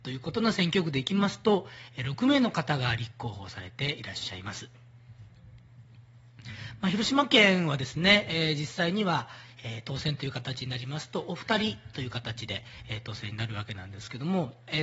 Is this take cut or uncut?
uncut